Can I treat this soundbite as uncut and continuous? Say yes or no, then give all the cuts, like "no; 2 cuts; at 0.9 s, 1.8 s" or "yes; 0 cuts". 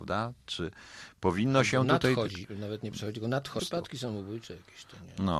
no; 1 cut; at 3.6 s